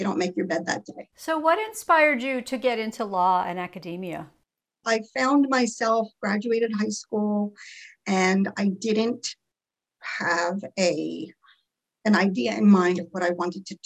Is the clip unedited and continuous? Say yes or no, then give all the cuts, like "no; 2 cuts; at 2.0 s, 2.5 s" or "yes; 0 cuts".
no; 1 cut; at 1.1 s